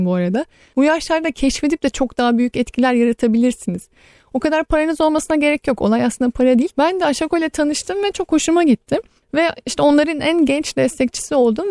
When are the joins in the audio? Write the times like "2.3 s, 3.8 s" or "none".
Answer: 6.7 s